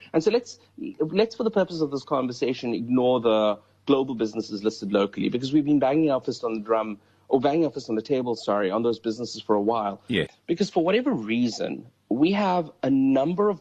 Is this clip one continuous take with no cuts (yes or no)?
no